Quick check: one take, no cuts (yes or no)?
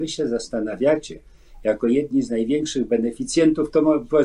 yes